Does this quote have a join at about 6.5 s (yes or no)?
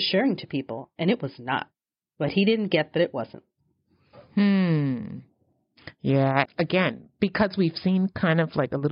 yes